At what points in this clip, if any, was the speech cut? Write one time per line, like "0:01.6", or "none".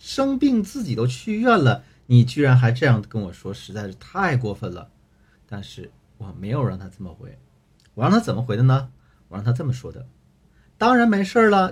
0:05.4

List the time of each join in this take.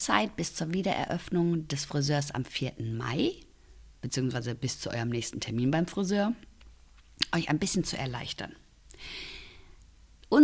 none

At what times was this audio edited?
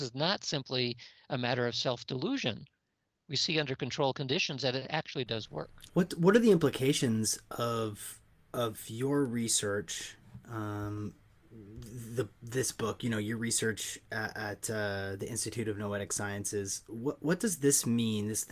0:05.9

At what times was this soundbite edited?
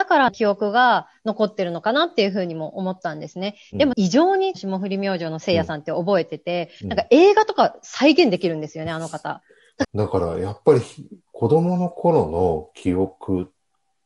0:09.8

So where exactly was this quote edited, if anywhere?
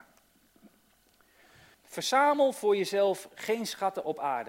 0:01.7

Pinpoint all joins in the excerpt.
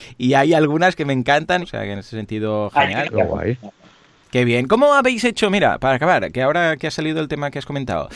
0:01.6
0:03.0

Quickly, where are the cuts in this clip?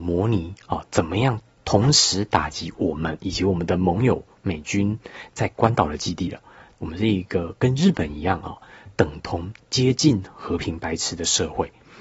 0:06.7
0:09.6

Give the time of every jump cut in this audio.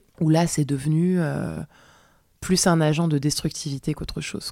none

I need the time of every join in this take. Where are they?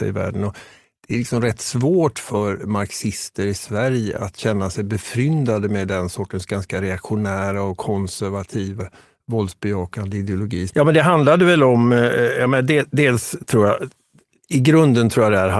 0:08.8
0:10.7

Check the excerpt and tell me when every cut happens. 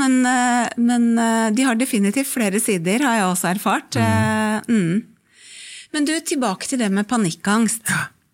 none

